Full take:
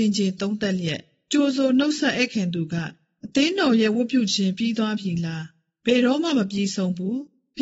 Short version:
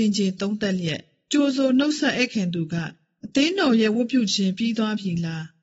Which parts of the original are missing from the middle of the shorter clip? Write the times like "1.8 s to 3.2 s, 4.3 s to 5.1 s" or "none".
none